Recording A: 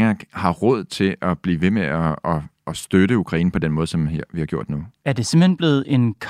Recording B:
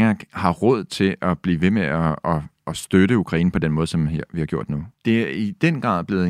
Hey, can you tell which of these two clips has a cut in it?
B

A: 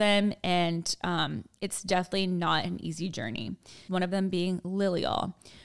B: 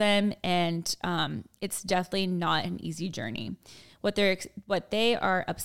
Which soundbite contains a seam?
A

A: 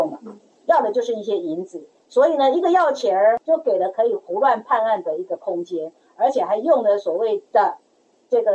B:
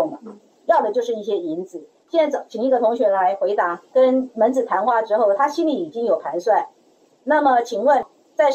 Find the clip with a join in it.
B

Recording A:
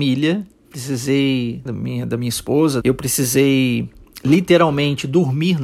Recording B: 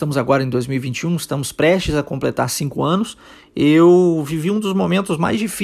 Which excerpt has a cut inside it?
A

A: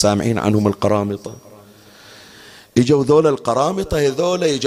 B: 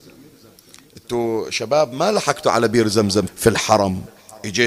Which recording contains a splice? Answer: B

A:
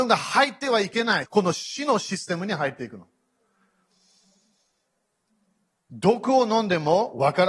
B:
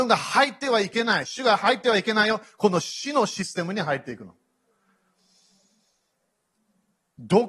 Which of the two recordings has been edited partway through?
A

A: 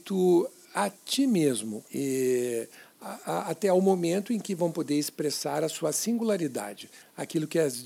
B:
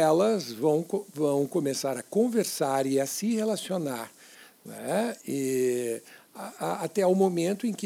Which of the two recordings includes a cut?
A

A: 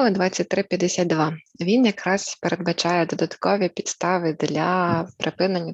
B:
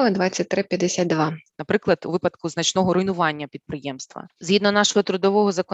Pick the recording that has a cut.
B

